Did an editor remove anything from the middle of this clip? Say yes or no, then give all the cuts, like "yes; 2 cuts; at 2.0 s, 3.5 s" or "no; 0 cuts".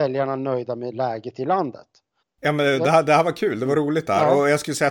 yes; 1 cut; at 2.2 s